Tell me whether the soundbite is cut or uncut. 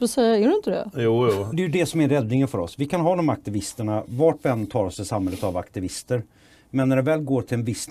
cut